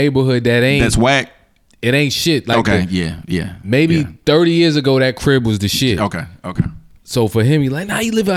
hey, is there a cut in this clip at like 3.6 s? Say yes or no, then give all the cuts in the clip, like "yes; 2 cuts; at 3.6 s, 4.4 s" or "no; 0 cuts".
no; 0 cuts